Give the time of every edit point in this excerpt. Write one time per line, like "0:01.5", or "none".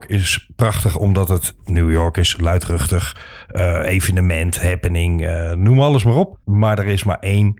0:06.4